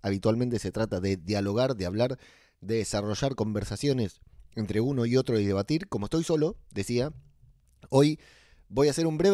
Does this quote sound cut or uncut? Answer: uncut